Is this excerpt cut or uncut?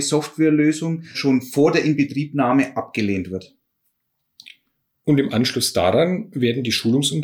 cut